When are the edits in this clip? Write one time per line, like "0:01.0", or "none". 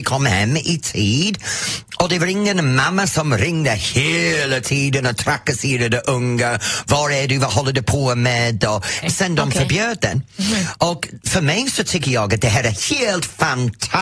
0:09.0
0:10.8